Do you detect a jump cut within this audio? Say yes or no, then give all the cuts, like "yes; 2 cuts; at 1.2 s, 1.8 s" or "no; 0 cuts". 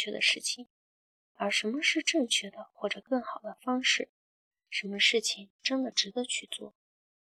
no; 0 cuts